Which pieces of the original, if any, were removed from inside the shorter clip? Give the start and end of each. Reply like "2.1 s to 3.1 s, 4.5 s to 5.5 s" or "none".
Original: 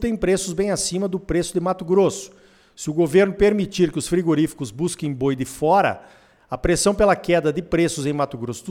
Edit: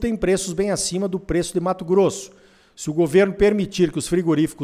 none